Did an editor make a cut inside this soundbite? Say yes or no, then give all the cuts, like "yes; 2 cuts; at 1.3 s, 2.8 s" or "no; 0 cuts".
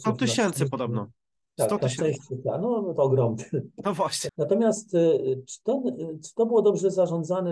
yes; 1 cut; at 4.3 s